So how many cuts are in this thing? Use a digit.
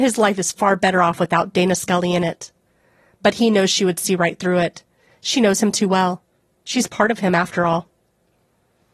0